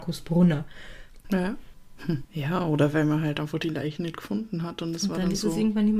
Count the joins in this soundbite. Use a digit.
2